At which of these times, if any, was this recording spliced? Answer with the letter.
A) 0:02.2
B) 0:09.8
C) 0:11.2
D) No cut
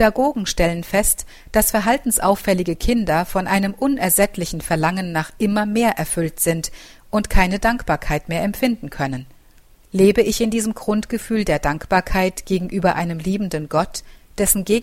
B